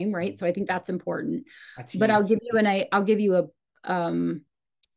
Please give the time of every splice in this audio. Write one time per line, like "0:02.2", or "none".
none